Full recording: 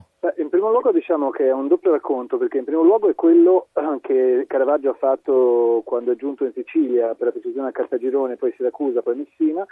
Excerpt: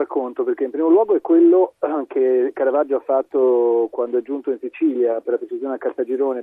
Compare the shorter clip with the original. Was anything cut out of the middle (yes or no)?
no